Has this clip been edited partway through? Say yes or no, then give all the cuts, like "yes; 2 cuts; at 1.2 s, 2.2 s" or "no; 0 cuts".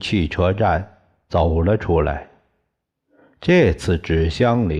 no; 0 cuts